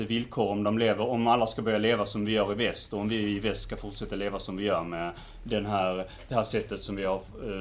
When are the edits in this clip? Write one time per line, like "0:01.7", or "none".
none

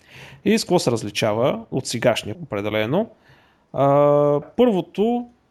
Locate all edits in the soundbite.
0:02.3
0:04.4

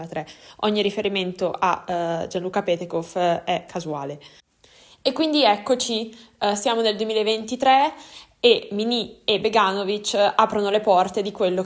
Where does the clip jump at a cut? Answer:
none

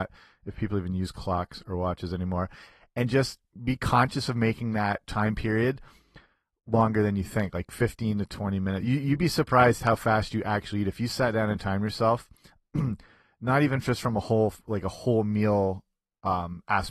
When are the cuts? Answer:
none

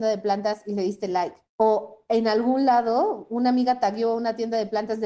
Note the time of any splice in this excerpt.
0:01.4

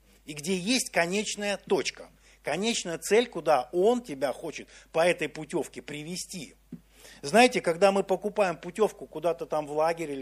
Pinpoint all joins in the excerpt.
none

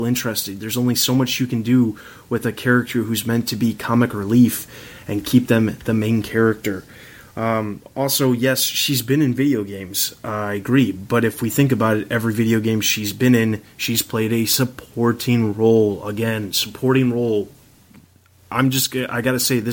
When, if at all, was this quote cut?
none

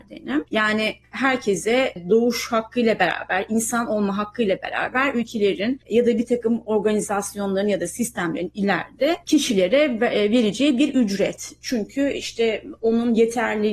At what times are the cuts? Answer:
0:09.2

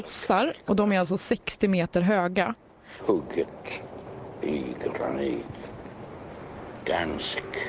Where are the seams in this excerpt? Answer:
0:03.0

